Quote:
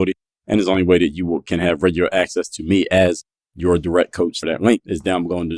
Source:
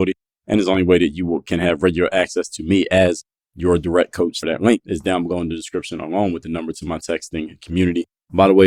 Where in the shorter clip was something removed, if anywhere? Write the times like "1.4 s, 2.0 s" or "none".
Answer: none